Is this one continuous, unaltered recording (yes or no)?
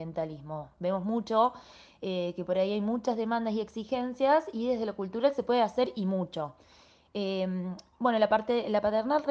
yes